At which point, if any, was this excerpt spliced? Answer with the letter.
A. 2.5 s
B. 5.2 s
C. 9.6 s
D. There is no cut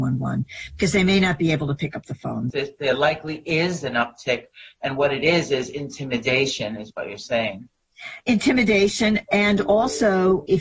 A